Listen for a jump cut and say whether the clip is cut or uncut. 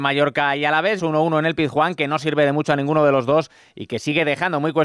cut